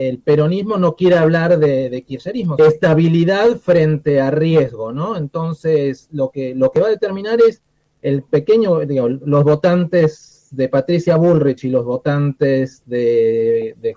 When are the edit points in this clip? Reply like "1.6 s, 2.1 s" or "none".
2.6 s